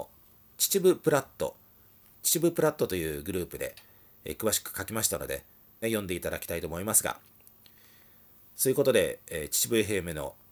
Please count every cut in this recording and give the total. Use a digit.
2